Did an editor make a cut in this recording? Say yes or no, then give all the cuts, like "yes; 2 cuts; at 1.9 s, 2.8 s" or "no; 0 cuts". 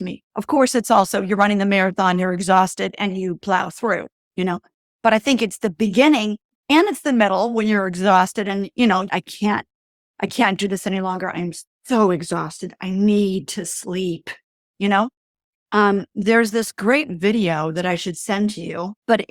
yes; 2 cuts; at 9.1 s, 15.5 s